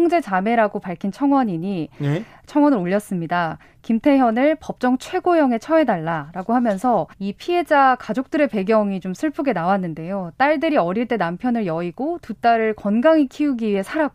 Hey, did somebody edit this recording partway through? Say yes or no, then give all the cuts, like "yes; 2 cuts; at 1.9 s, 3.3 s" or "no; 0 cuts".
yes; 1 cut; at 7.1 s